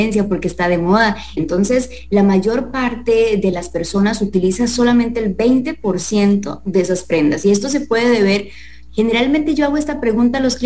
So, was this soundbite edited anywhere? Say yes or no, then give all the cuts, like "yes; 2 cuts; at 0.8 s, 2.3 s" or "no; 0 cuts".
yes; 2 cuts; at 1.4 s, 8.9 s